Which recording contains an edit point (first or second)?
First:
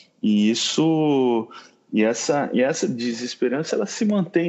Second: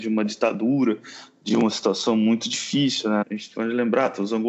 second